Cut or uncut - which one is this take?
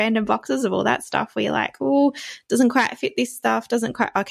uncut